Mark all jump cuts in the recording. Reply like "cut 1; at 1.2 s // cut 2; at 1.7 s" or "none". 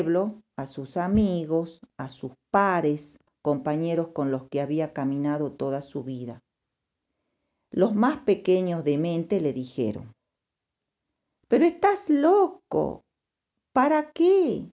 cut 1; at 3.3 s